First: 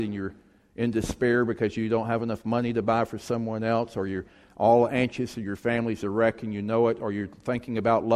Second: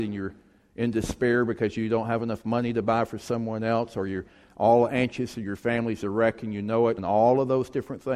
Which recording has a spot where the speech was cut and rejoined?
second; 1 cut; at 7.0 s

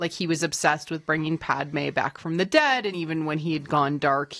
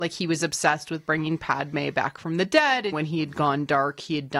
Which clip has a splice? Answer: second; 1 cut; at 2.9 s

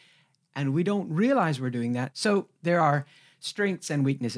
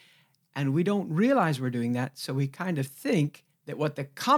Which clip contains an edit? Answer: first; 1 cut; at 2.1 s

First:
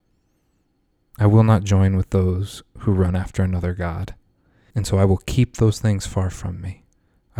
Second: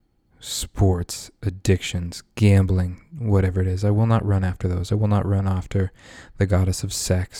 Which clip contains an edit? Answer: first; 2 cuts; at 1.2 s, 4.7 s

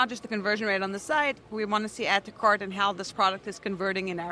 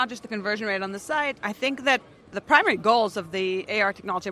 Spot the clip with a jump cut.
second; 1 cut; at 1.4 s

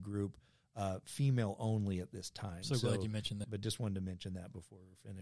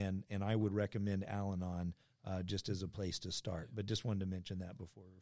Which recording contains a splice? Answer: first; 1 cut; at 3.4 s

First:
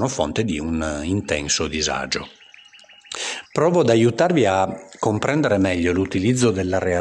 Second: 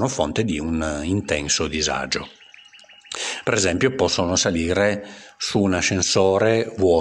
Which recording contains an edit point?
first; 1 cut; at 3.5 s

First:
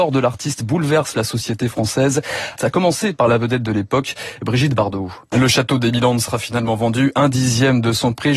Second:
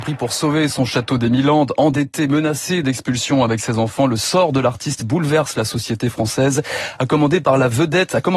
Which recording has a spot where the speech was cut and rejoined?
first; 2 cuts; at 2.6 s, 5.3 s

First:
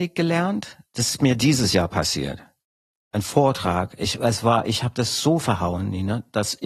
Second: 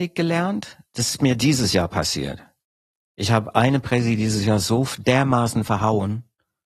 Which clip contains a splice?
first; 1 cut; at 3.0 s

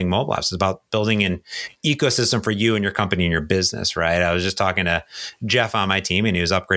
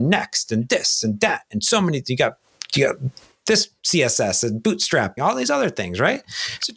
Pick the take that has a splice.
second; 1 cut; at 5.2 s

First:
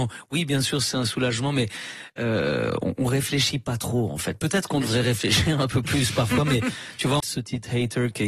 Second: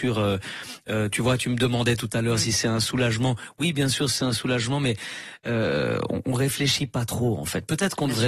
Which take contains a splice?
first; 1 cut; at 7.2 s

